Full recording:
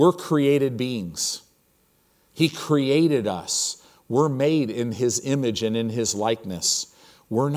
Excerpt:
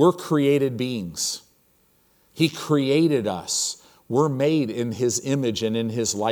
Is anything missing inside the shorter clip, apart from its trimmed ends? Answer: no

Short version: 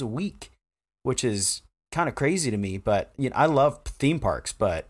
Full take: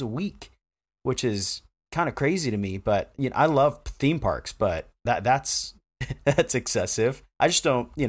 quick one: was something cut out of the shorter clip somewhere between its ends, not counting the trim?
no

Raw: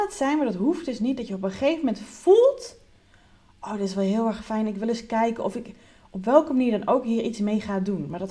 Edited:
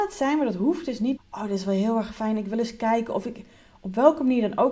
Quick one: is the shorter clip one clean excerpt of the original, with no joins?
no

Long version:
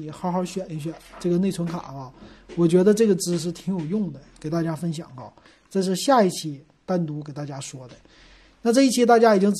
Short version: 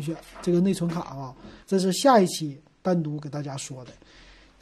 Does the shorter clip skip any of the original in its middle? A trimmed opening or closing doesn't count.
yes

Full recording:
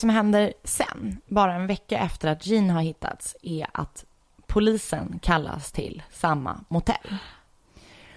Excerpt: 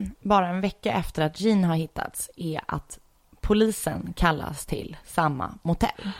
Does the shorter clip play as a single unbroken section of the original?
yes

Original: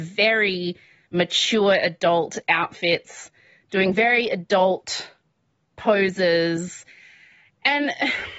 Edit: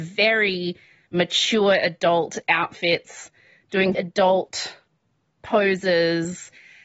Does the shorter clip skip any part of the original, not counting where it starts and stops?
yes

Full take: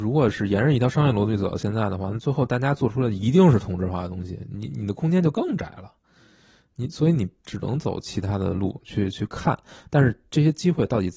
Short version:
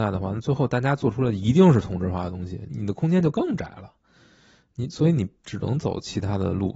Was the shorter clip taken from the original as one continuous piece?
no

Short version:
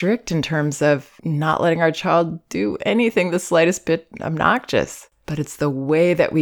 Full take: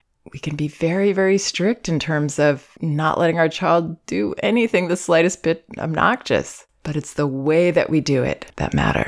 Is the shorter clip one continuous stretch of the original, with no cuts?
yes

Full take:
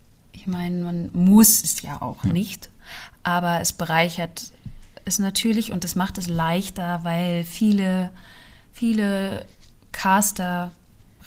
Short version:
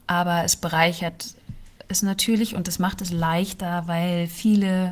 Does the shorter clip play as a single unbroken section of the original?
yes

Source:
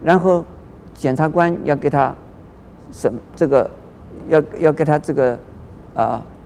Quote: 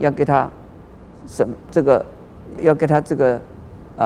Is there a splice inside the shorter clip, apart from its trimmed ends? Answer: yes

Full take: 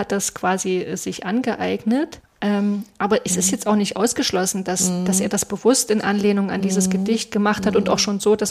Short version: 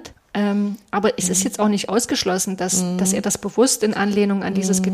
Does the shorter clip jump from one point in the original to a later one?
no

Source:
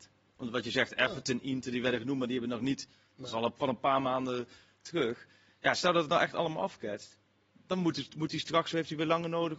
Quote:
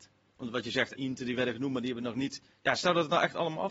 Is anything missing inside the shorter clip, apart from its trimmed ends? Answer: yes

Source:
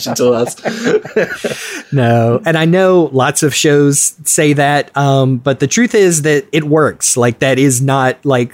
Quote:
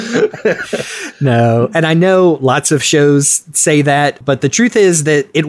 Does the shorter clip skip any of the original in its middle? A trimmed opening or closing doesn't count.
yes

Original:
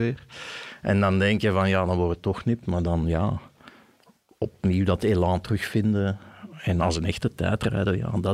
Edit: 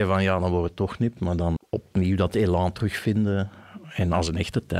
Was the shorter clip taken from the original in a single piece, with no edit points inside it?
no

